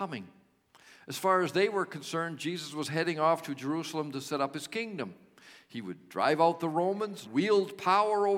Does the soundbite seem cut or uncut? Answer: cut